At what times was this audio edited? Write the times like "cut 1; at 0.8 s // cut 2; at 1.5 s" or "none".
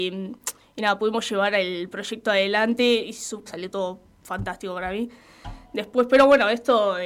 cut 1; at 3.5 s